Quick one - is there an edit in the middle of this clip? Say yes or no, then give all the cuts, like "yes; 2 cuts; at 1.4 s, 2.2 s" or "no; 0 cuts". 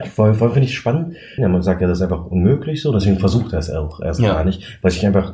yes; 1 cut; at 1.4 s